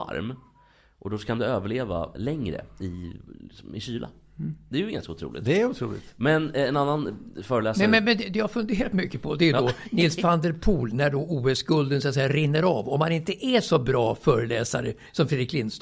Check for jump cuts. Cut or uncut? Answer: cut